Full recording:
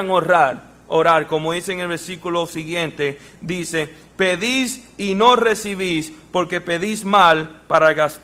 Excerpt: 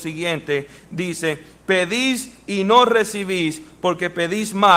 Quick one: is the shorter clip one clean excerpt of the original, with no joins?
yes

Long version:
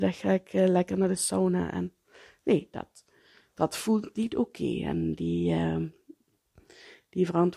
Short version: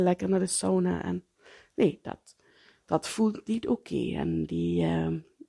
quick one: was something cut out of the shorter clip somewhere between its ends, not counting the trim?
no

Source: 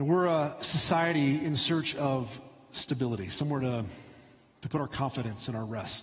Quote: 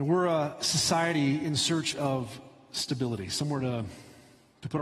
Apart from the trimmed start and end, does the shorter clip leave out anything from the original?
no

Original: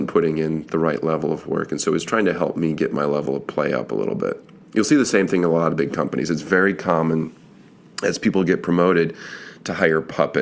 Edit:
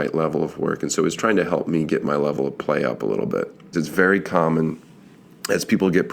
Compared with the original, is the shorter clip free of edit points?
no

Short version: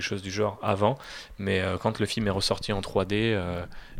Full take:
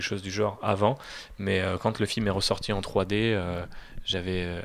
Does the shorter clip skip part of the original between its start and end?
no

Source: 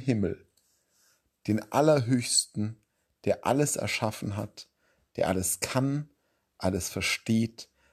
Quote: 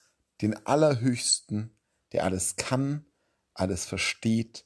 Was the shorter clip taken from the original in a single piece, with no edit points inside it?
no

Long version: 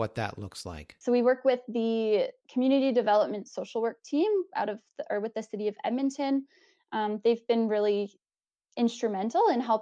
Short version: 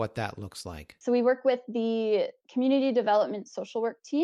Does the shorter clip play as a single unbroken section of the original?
yes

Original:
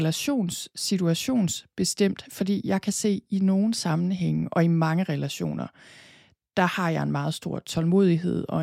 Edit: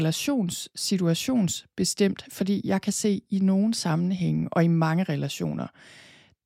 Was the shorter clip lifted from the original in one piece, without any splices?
yes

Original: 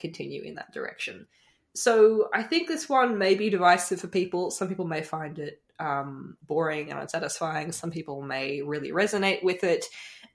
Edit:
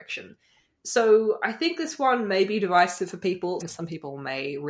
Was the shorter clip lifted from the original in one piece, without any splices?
no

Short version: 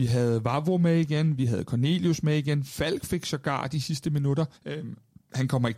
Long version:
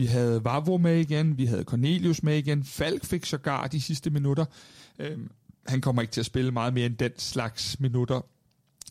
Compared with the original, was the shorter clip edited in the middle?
yes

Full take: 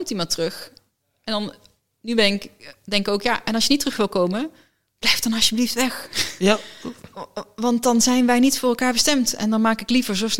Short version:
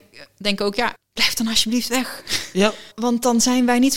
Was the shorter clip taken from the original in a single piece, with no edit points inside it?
no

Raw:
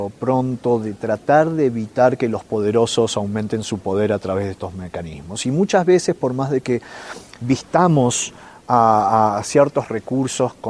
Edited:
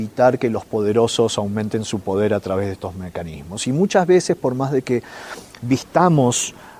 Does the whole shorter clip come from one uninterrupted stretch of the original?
yes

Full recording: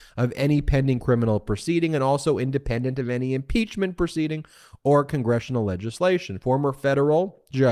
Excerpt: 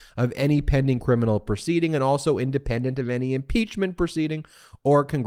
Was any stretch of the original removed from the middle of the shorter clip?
no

